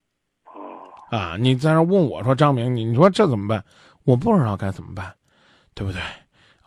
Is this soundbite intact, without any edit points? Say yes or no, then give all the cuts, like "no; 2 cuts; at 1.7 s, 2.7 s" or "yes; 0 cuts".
yes; 0 cuts